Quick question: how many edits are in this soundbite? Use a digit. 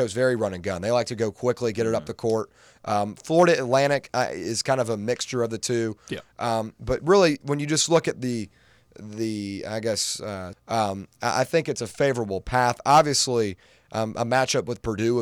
1